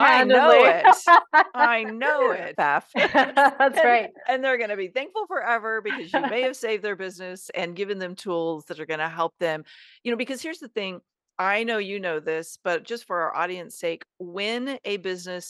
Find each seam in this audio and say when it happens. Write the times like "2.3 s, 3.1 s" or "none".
2.5 s

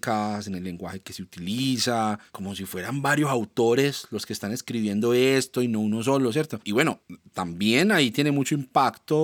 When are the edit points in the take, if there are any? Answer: 6.6 s

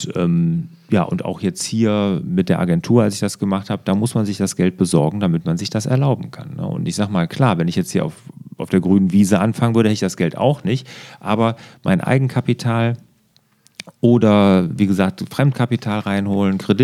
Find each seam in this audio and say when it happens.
none

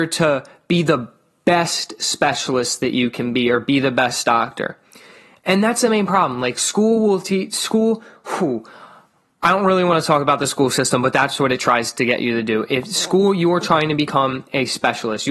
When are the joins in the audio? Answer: none

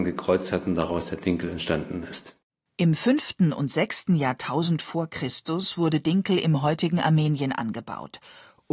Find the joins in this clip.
none

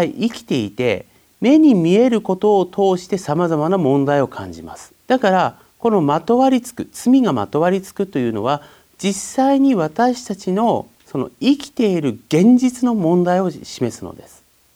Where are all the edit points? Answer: 5.0 s, 10.9 s

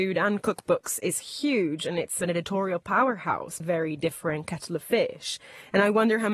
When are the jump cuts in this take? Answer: 3.6 s

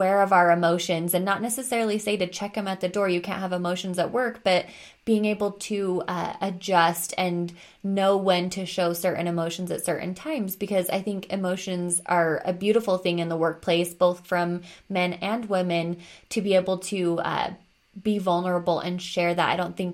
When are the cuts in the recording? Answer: none

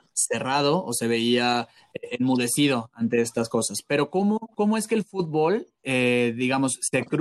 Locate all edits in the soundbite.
none

